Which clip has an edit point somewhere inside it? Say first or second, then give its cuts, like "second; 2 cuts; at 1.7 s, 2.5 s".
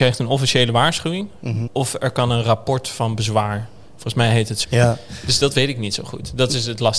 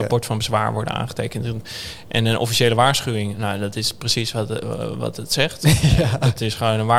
first; 2 cuts; at 1.7 s, 4.6 s